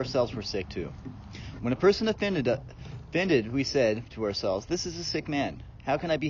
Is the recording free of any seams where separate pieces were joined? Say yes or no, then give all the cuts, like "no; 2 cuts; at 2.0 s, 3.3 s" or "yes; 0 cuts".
no; 1 cut; at 1.6 s